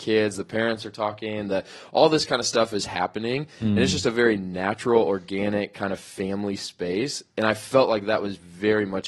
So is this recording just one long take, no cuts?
yes; 0 cuts

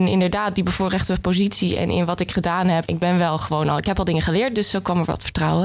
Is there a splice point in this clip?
yes; 1 cut; at 2.9 s

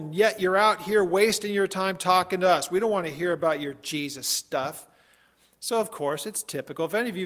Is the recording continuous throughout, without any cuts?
yes; 0 cuts

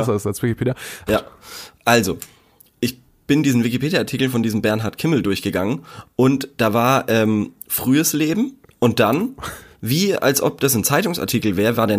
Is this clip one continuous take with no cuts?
no; 1 cut; at 1.1 s

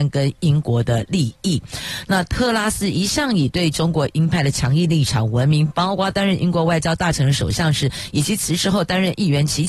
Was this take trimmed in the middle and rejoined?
no; 0 cuts

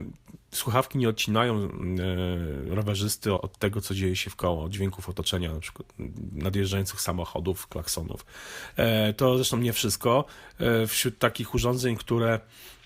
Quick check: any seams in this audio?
yes; 1 cut; at 3.4 s

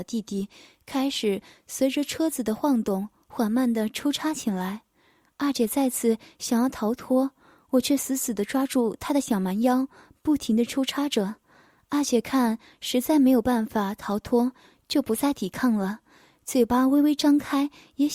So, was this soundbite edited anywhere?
no; 0 cuts

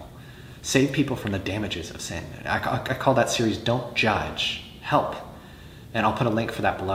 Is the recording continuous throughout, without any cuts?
yes; 0 cuts

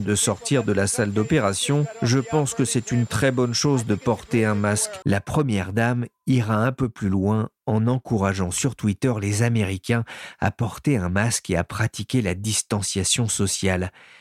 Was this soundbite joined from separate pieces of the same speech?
yes; 1 cut; at 5.0 s

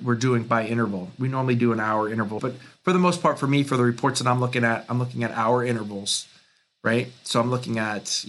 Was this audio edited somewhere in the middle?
yes; 1 cut; at 2.4 s

